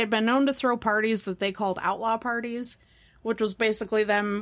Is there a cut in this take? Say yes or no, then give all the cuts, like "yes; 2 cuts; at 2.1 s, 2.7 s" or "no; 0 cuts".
no; 0 cuts